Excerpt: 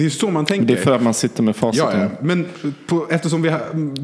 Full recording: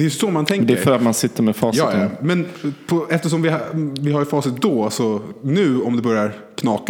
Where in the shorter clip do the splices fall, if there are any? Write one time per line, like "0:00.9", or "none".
none